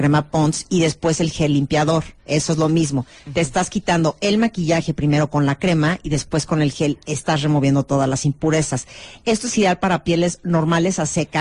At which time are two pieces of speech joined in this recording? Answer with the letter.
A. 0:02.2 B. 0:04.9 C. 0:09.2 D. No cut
A